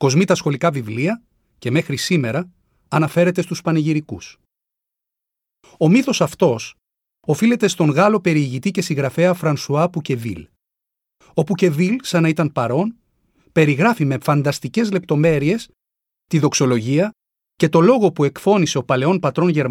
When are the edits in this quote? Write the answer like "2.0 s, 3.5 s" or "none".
none